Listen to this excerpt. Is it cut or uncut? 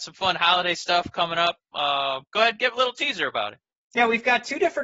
uncut